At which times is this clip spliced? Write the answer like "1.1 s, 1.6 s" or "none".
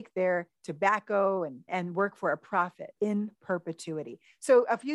1.7 s, 3.0 s